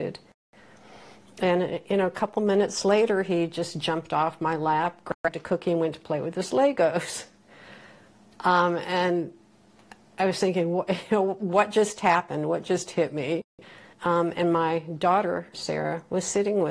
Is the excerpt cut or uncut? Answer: cut